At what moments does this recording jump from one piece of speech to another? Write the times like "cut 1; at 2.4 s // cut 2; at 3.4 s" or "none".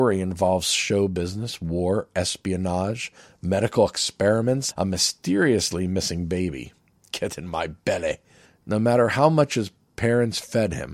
cut 1; at 4.7 s // cut 2; at 8.5 s